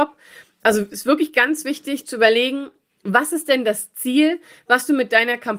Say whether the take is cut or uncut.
uncut